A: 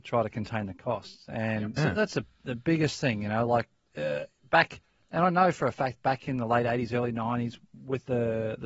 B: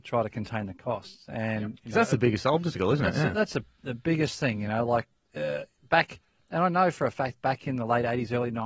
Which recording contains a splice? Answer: A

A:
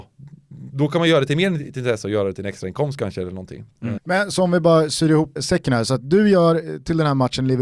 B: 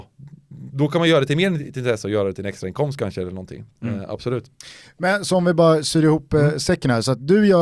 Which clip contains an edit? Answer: A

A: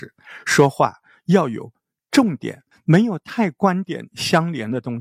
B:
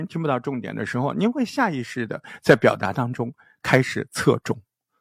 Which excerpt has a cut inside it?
A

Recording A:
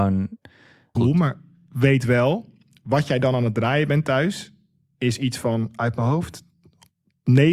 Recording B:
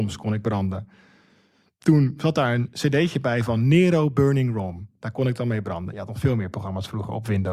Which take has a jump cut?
A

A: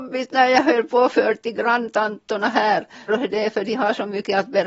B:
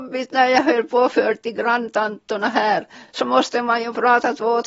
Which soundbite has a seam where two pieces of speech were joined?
A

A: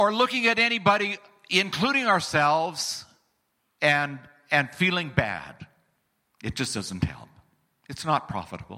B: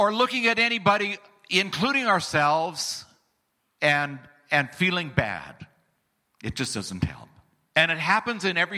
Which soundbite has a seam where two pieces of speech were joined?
B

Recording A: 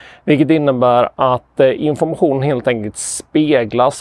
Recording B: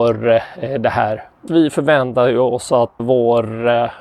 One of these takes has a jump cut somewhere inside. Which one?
B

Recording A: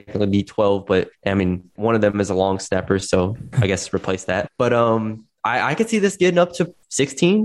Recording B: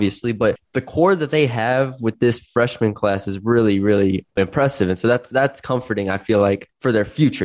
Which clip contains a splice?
A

